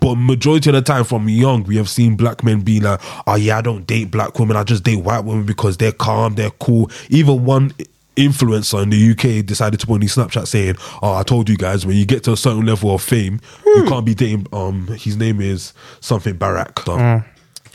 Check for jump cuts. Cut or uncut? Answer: cut